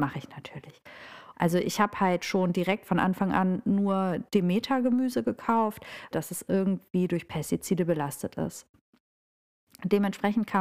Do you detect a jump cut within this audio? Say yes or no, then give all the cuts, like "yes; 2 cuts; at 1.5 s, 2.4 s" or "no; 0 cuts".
yes; 2 cuts; at 1.3 s, 6.1 s